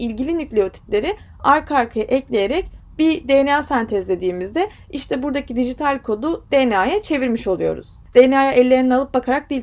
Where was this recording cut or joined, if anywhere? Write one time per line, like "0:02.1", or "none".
0:08.0